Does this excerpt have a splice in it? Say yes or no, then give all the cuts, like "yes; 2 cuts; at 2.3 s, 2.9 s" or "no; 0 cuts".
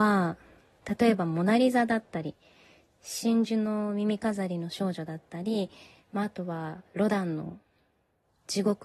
no; 0 cuts